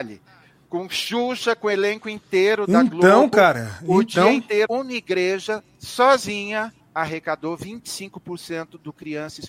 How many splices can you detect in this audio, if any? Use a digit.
2